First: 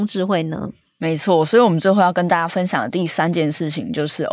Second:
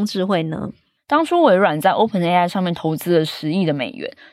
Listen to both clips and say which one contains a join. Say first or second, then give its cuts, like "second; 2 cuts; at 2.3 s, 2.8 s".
second; 1 cut; at 1.0 s